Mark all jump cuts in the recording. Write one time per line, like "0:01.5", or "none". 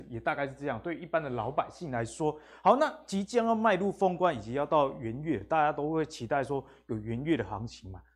none